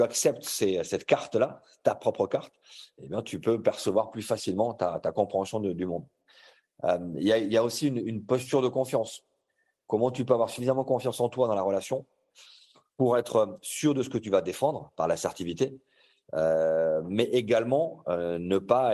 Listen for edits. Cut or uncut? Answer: uncut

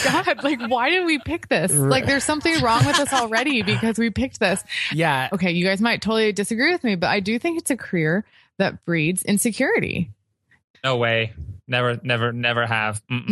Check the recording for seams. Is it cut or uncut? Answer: cut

